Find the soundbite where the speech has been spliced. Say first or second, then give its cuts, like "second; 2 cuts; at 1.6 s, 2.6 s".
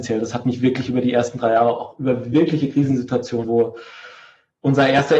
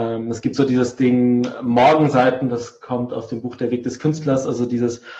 first; 1 cut; at 3.4 s